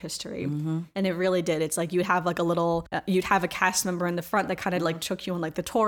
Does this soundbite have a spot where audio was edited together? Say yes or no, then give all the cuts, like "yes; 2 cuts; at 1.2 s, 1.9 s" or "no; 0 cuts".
no; 0 cuts